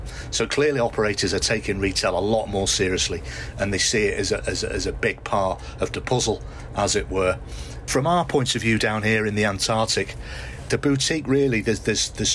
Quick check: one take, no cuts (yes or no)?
yes